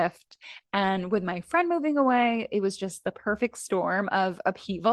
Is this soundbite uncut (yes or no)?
yes